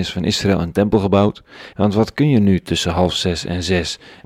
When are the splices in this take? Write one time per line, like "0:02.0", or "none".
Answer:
0:01.7

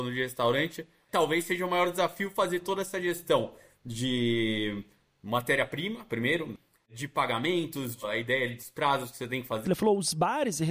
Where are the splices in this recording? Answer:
0:09.7

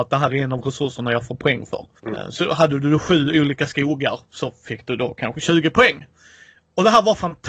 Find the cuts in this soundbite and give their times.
0:02.0

